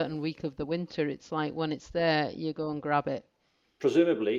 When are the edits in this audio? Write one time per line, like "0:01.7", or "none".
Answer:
none